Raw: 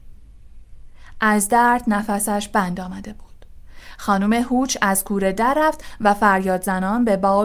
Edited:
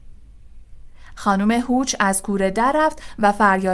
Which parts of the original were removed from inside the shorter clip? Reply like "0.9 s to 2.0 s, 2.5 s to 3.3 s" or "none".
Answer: 1.1 s to 4.0 s

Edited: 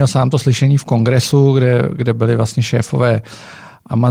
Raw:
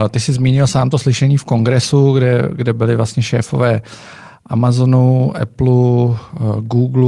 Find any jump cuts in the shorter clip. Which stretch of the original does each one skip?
none

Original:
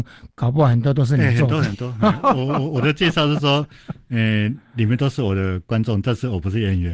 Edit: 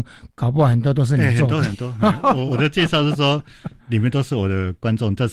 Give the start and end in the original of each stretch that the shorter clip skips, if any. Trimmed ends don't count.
2.5 s to 2.7 s, 4.0 s to 4.7 s

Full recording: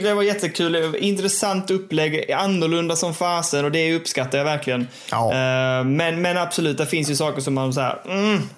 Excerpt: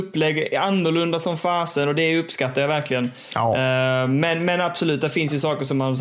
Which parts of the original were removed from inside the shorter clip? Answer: none

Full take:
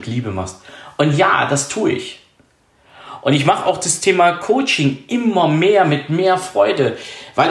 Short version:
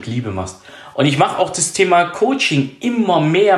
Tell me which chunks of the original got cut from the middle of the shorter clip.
0.9 s to 3.2 s

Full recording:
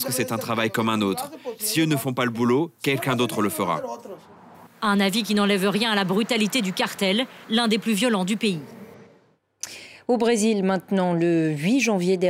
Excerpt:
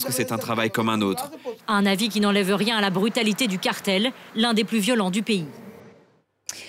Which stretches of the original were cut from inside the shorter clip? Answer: 1.6 s to 4.7 s

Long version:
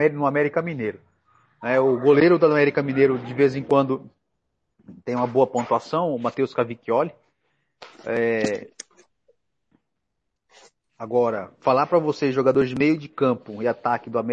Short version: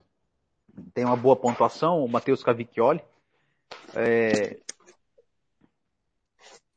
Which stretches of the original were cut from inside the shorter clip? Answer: none

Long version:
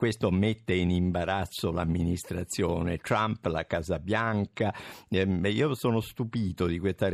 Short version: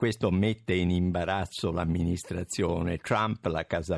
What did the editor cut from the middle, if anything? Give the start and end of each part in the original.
none

